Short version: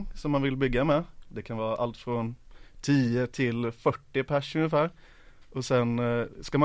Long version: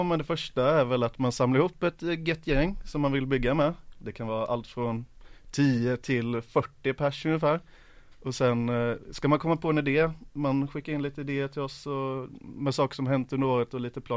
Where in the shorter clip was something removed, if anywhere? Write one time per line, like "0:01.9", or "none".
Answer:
none